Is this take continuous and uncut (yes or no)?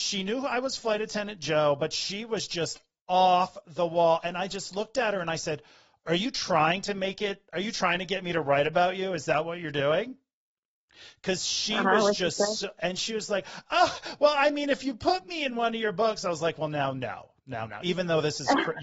yes